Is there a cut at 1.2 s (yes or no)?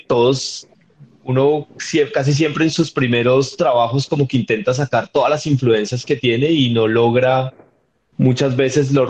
no